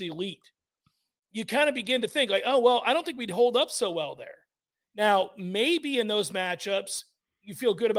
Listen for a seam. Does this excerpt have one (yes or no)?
no